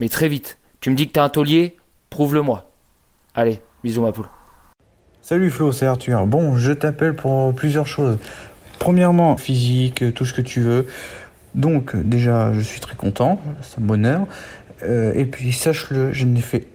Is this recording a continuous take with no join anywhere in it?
no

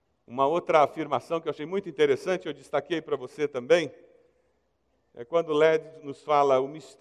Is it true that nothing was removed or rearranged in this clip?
yes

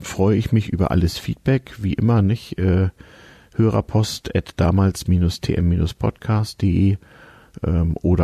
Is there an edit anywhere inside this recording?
no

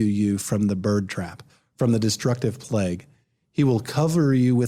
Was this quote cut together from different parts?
no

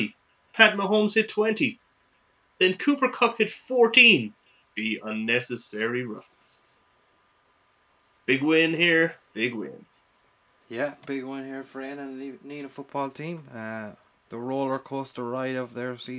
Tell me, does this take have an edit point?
yes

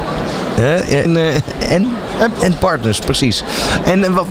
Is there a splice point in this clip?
yes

